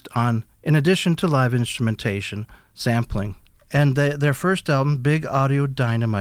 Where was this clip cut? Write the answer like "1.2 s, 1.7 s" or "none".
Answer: 3.5 s